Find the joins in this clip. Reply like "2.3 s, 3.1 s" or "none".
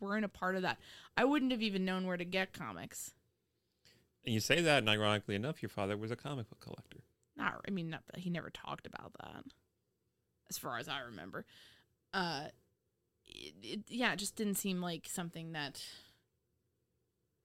none